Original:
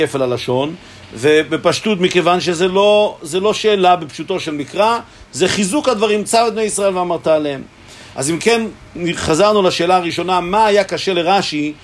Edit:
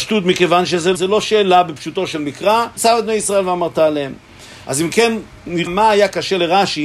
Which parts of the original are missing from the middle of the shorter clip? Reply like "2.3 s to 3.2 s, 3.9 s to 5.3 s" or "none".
2.7 s to 3.3 s, 5.1 s to 6.2 s, 9.1 s to 10.4 s